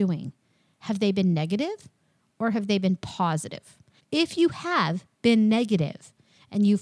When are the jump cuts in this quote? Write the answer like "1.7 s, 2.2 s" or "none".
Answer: 4.0 s